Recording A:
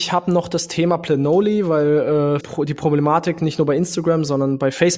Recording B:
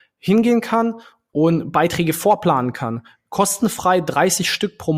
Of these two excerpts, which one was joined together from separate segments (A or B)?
A